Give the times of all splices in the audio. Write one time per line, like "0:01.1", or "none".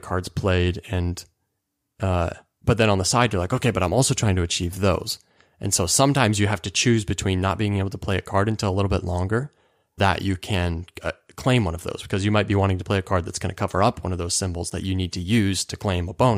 0:10.0